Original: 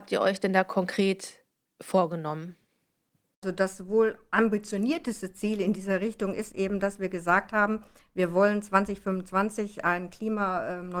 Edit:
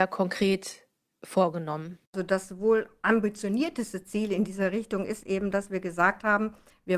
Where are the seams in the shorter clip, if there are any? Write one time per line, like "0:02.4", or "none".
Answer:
0:02.1